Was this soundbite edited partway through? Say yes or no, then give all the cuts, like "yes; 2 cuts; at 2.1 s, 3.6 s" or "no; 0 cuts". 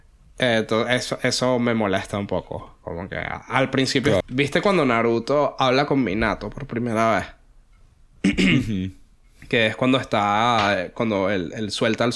yes; 1 cut; at 4.2 s